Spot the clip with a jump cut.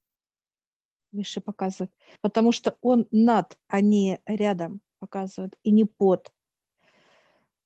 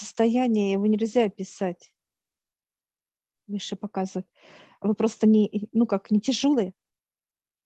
first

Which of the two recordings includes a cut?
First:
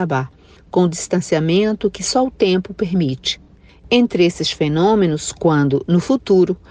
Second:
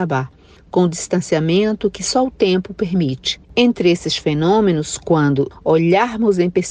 second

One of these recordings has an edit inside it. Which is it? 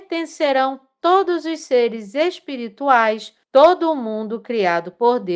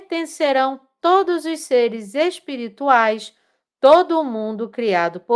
first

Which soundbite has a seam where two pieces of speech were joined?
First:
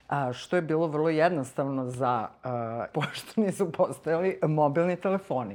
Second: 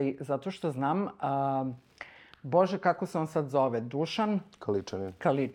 first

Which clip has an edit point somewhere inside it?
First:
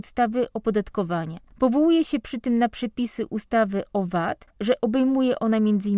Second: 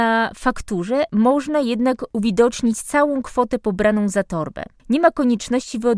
first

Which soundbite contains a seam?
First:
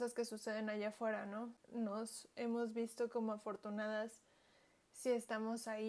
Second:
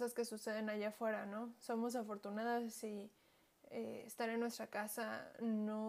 first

